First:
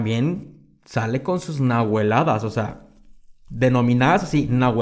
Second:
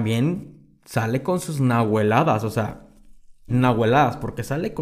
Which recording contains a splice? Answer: second; 1 cut; at 3.5 s

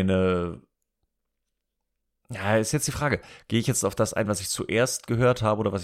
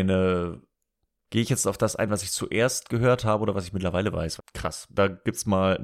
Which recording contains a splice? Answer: second; 2 cuts; at 1.3 s, 4.4 s

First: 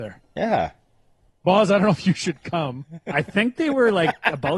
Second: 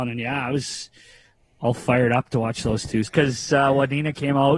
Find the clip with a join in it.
second; 1 cut; at 3.1 s

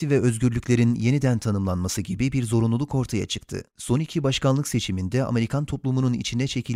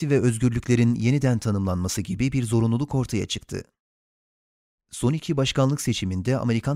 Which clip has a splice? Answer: first; 1 cut; at 3.7 s

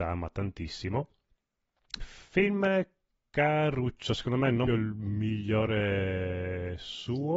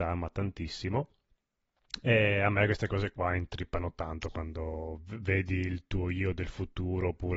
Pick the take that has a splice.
first; 2 cuts; at 2.0 s, 4.7 s

